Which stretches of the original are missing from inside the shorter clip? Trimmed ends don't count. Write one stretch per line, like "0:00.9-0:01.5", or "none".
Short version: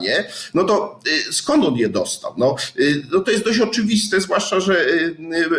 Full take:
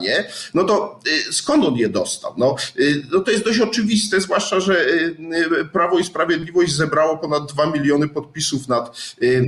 none